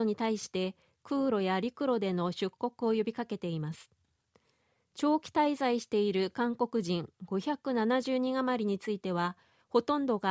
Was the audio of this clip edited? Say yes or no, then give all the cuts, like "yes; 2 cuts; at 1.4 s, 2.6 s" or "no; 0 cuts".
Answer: no; 0 cuts